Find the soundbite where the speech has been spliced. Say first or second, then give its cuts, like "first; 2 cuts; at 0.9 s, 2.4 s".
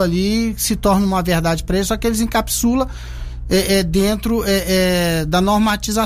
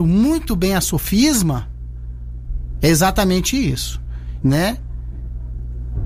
second; 1 cut; at 4.4 s